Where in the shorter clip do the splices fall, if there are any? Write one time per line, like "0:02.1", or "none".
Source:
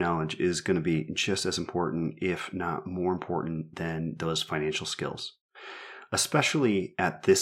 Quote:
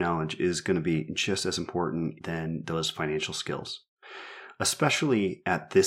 0:02.2